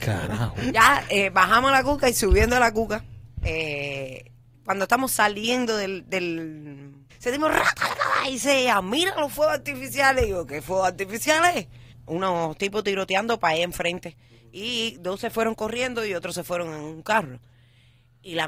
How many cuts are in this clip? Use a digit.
2